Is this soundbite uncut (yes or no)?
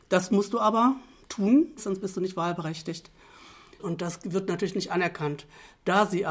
no